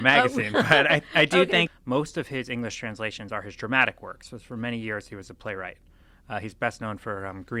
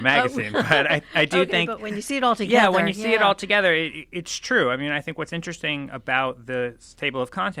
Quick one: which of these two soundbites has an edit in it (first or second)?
first